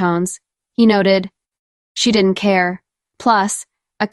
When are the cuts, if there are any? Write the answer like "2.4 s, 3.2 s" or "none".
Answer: 1.8 s, 3.1 s